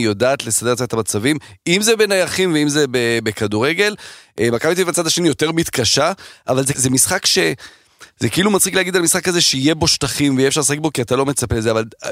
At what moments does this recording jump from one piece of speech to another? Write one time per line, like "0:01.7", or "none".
0:06.7